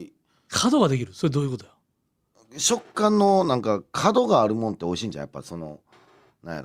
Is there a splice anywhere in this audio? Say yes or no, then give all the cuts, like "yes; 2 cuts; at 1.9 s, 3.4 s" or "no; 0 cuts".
no; 0 cuts